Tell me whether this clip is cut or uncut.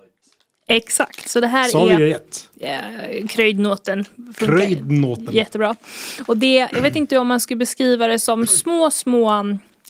uncut